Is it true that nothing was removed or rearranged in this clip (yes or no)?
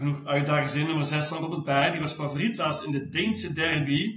no